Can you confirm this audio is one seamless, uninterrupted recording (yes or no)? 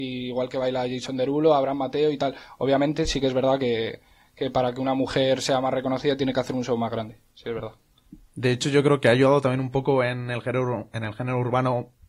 yes